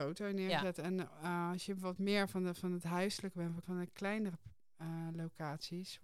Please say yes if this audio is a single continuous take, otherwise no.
no